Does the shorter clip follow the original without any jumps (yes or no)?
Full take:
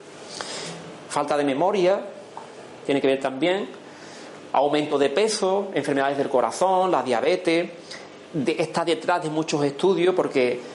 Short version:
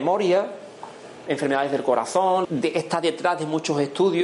no